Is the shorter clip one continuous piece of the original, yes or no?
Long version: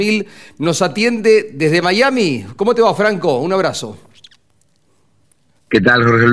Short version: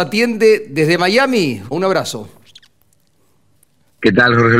no